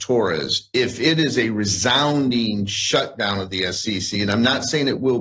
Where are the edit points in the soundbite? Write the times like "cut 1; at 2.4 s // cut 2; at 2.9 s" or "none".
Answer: none